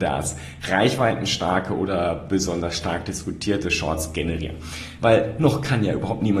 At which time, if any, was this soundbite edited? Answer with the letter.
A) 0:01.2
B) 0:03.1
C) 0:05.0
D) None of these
C